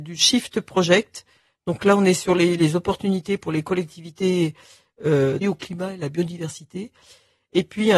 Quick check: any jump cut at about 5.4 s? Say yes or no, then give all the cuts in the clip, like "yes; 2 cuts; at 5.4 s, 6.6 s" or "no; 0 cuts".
yes; 2 cuts; at 2.6 s, 5.4 s